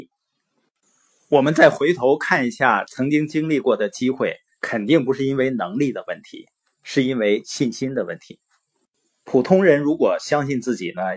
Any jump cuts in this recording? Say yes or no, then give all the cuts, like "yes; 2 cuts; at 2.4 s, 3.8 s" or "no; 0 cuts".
yes; 1 cut; at 4.5 s